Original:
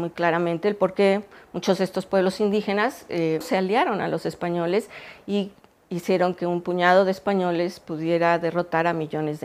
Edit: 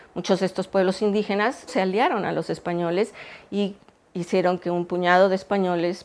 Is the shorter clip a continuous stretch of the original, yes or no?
no